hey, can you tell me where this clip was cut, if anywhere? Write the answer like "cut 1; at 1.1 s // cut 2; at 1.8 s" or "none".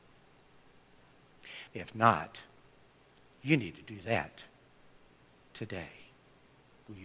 cut 1; at 1.7 s